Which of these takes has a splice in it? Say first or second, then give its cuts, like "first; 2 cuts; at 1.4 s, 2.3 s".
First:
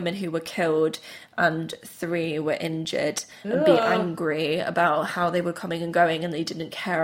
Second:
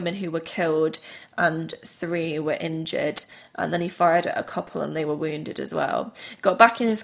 first; 1 cut; at 3.4 s